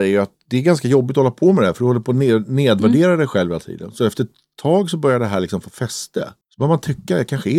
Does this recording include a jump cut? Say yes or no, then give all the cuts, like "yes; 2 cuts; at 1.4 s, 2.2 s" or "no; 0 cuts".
yes; 1 cut; at 6.4 s